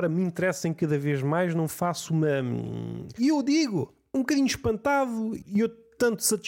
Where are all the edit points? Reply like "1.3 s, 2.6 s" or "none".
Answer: 3.2 s